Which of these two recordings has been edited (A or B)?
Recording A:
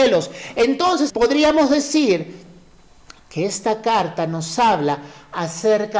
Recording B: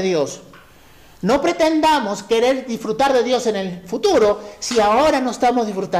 A